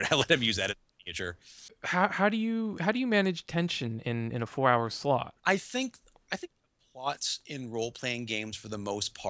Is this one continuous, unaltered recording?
no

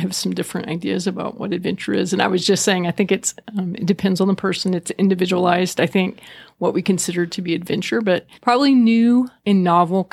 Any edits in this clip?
no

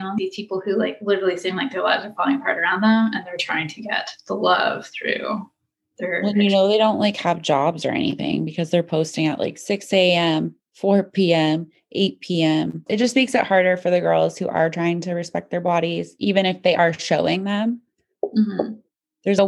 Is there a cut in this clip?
yes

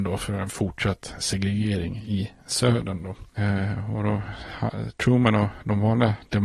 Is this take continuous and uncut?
no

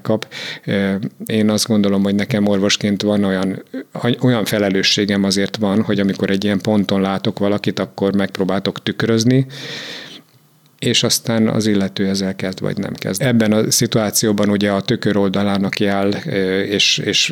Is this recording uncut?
no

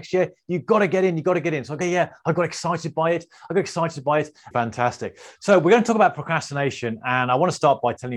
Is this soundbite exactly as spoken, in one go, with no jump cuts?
no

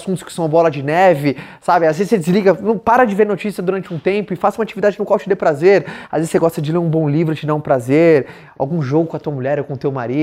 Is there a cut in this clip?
no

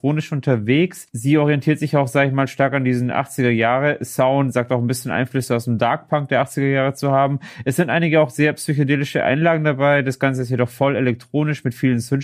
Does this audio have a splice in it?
no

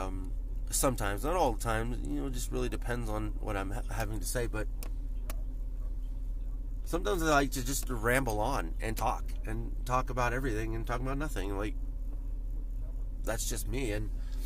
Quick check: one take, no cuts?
no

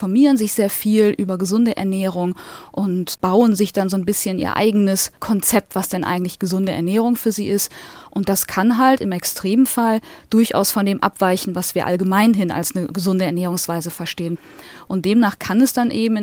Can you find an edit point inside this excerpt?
no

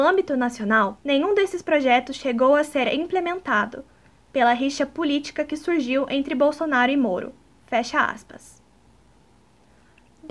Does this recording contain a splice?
yes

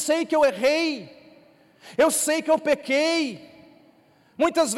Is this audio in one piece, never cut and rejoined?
yes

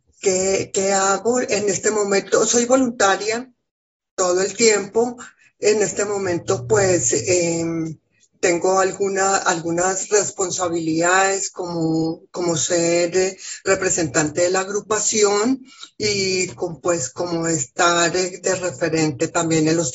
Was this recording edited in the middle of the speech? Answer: no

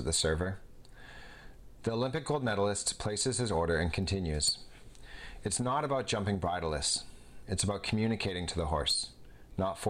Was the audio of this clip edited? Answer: no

